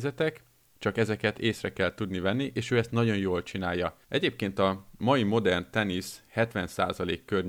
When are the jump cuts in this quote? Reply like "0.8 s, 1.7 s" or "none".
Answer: 4.0 s